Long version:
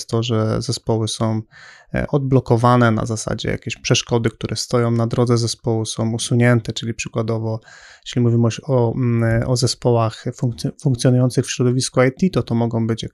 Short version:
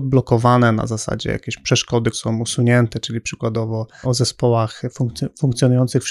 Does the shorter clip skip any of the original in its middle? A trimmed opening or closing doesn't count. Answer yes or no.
yes